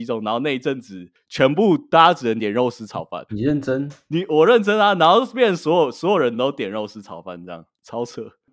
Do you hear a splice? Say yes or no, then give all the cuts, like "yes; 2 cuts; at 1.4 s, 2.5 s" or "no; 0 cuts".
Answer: yes; 1 cut; at 3.3 s